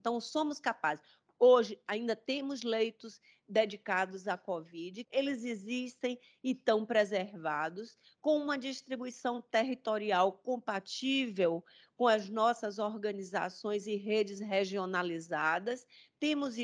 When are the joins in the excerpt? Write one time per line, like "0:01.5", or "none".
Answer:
0:05.0

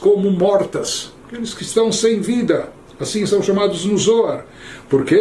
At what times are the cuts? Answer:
0:01.2

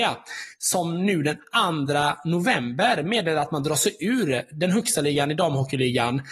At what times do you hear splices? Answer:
none

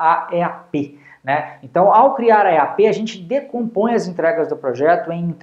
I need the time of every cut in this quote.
none

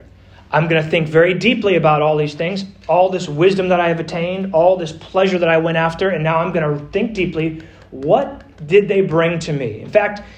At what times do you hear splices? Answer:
none

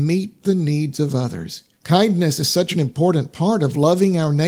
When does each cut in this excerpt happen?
0:01.7

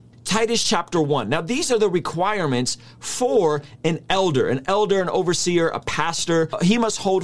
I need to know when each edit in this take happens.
none

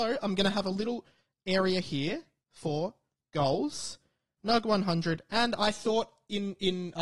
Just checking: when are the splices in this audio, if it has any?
0:04.4

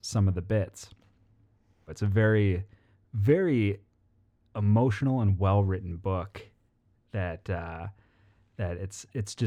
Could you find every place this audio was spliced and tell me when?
0:01.9

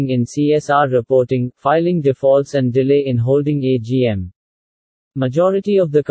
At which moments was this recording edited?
0:01.5

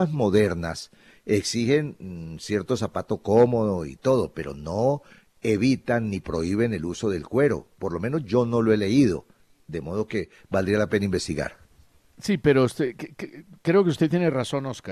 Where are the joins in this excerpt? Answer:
none

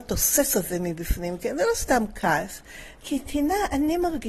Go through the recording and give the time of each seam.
0:03.0

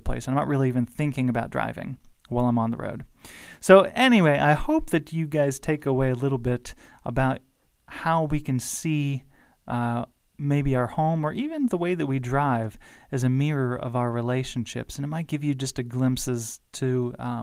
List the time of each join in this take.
none

